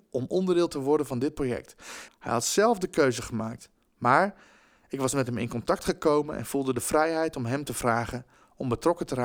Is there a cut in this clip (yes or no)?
yes